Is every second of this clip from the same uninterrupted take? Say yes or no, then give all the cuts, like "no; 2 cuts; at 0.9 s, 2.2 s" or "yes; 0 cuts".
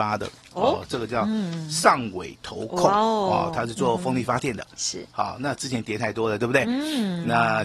yes; 0 cuts